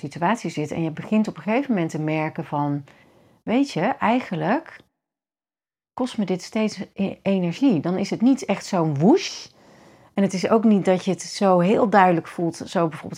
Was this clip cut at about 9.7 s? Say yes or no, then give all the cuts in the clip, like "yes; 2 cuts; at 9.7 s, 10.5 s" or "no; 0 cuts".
no; 0 cuts